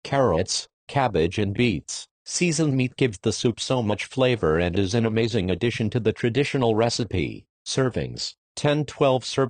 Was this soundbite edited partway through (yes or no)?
no